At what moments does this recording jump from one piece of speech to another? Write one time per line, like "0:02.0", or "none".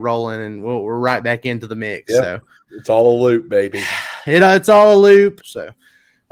0:05.4